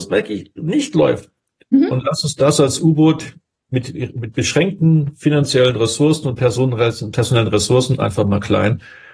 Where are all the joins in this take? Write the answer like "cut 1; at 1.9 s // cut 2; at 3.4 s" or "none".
none